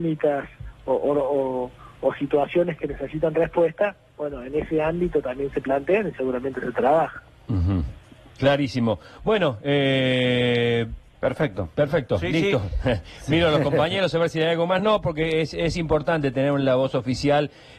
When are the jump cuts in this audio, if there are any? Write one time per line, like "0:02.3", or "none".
none